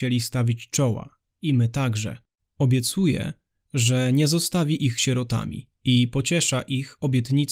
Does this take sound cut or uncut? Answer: cut